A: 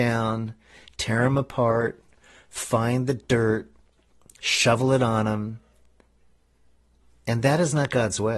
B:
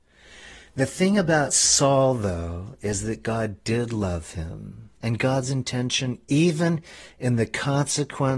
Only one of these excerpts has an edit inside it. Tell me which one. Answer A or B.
B